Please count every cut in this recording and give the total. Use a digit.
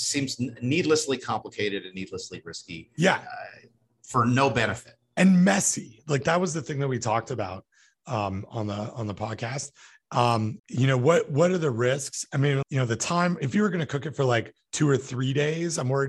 2